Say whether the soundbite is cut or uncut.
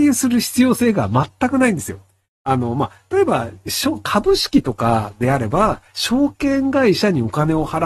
uncut